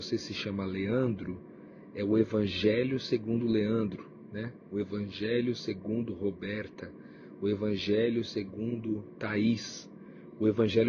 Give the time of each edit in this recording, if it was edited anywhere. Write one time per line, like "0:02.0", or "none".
none

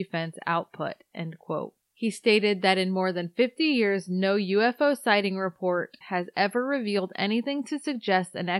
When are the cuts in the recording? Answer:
0:06.0

